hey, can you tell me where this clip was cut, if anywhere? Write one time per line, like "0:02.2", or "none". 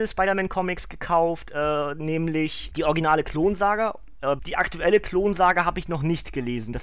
0:02.7
0:04.4